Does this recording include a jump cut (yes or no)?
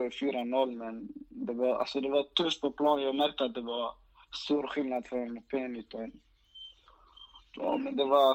no